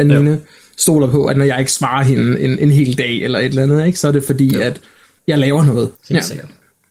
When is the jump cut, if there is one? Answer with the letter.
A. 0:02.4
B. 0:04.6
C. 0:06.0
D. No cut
C